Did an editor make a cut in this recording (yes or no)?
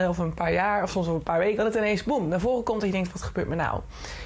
yes